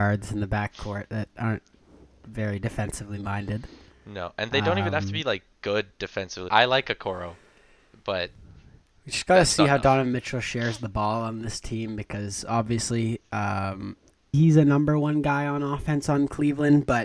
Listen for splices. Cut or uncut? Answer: cut